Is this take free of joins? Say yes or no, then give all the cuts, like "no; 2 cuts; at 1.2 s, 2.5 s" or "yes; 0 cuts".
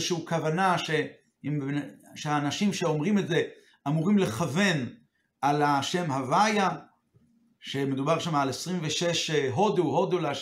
yes; 0 cuts